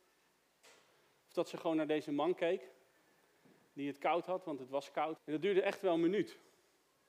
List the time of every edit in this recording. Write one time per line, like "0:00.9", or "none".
0:05.2